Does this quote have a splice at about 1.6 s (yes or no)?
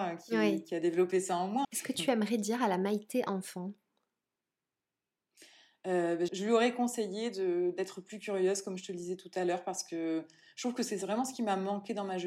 yes